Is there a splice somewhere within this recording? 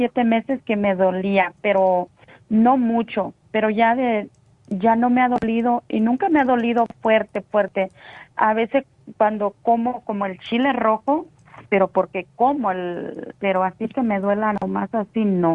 yes; 2 cuts; at 11.7 s, 13.3 s

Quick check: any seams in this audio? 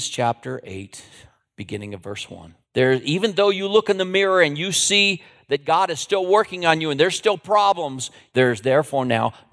yes; 2 cuts; at 2.6 s, 8.3 s

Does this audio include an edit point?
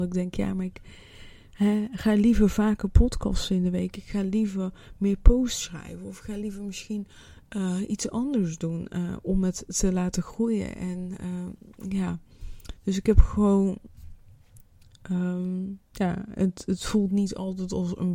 yes; 1 cut; at 15.8 s

